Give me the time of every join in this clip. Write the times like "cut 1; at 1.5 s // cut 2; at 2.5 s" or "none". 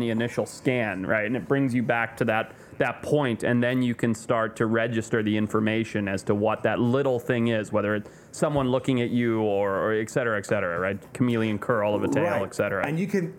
none